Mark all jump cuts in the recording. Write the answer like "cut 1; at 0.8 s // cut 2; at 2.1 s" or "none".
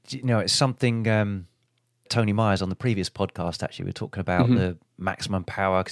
cut 1; at 2.1 s